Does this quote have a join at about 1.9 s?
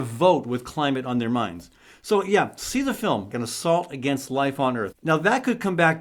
no; 2 cuts; at 3.3 s, 4.9 s

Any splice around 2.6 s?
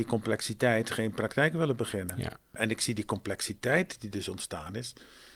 yes; 1 cut; at 2.6 s

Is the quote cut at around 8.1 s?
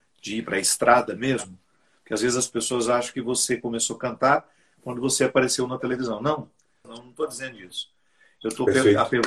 no; 1 cut; at 6.8 s

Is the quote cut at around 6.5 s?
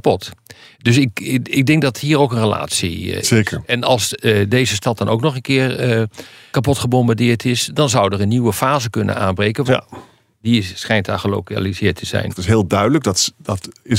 yes; 3 cuts; at 6.5 s, 9.7 s, 12.3 s

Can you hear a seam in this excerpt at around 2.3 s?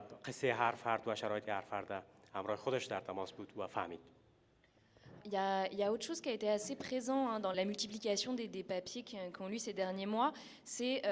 no; 2 cuts; at 5.2 s, 7.5 s

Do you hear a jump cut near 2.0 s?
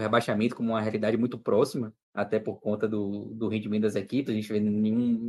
yes; 1 cut; at 2.0 s

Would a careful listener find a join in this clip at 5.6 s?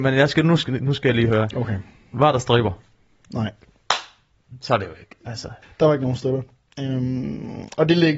yes; 1 cut; at 5.6 s

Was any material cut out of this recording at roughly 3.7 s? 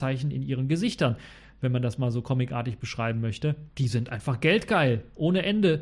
yes; 1 cut; at 3.7 s

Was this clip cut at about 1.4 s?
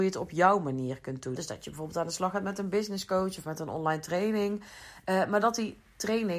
yes; 1 cut; at 1.4 s

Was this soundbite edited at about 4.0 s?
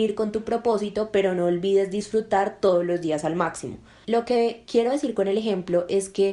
yes; 1 cut; at 4.0 s

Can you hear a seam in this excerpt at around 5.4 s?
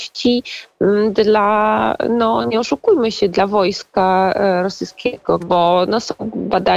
yes; 1 cut; at 5.4 s

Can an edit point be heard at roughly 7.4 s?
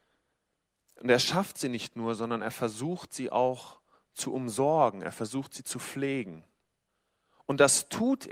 no; 0 cuts

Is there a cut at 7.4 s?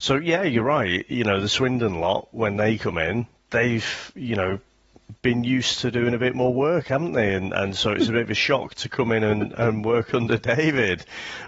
no; 0 cuts

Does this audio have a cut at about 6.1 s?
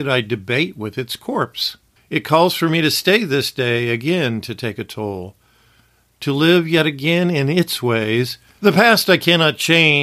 no; 2 cuts; at 2.0 s, 8.6 s

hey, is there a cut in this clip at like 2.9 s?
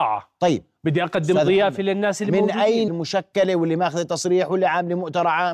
yes; 1 cut; at 2.9 s

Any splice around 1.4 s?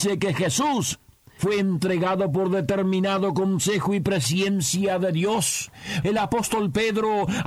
no; 1 cut; at 6.0 s

